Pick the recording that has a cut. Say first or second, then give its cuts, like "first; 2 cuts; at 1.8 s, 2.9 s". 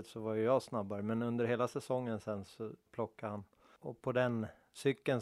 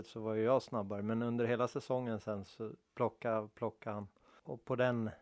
first; 1 cut; at 2.9 s